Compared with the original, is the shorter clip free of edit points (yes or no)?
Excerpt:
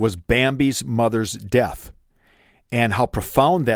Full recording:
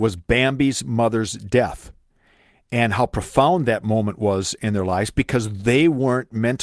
yes